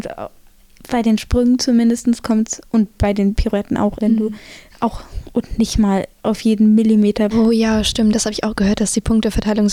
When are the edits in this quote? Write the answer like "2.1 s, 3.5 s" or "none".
4.0 s, 7.3 s